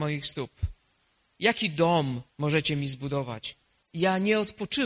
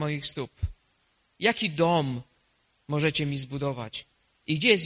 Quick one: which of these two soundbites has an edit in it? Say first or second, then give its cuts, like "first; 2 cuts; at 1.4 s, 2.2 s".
first; 2 cuts; at 2.3 s, 3.8 s